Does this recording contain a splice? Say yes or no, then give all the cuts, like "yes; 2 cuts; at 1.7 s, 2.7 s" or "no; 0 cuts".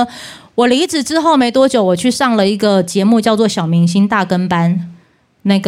no; 0 cuts